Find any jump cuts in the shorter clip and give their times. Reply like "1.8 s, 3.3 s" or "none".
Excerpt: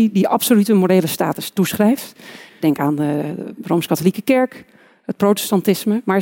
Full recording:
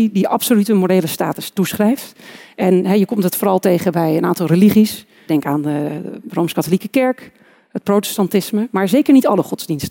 2.5 s